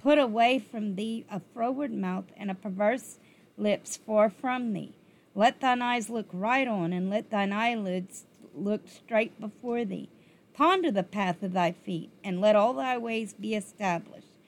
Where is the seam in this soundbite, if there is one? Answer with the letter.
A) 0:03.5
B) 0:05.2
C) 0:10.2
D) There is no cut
D